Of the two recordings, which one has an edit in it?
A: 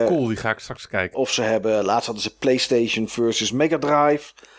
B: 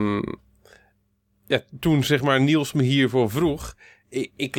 A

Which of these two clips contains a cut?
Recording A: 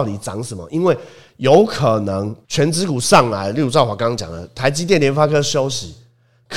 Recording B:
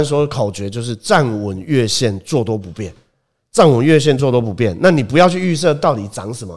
A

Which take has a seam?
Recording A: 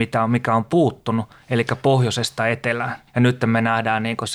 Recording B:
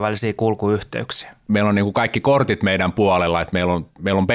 A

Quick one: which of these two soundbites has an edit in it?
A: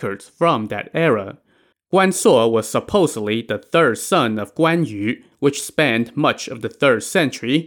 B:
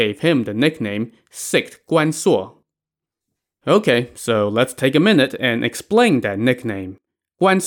A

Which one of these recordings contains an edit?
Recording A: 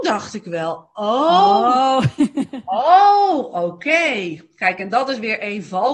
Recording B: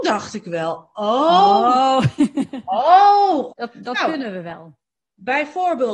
B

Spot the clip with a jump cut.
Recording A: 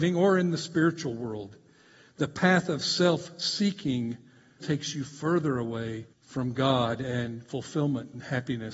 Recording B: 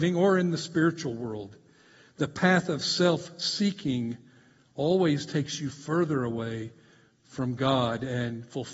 A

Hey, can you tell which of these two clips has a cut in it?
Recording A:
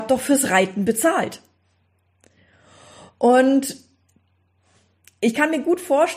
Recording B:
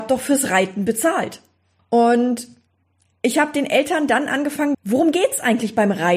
B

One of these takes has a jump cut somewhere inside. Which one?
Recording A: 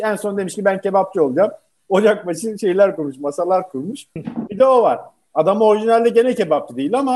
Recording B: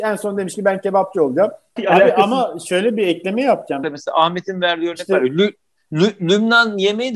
B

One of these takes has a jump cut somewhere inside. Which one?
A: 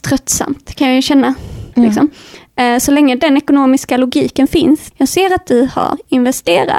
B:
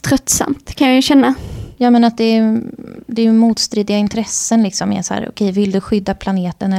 A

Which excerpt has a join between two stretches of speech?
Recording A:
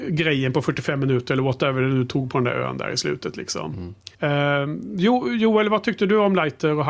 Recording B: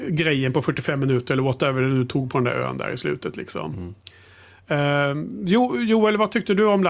A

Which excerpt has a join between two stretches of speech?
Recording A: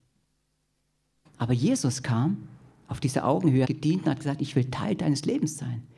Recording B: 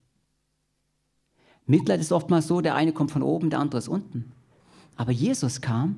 A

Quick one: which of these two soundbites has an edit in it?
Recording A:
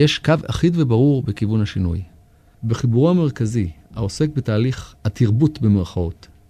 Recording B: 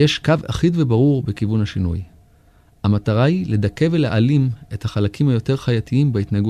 A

